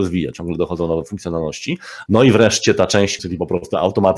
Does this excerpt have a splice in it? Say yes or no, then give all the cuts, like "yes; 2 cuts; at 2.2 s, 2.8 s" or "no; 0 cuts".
yes; 2 cuts; at 2.1 s, 3.2 s